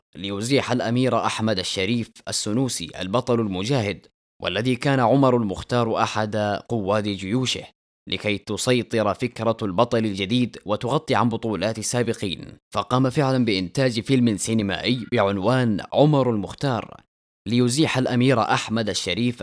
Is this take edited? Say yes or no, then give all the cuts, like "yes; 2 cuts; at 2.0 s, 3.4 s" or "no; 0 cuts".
yes; 1 cut; at 12.6 s